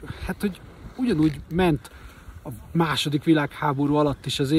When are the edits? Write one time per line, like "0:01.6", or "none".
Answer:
none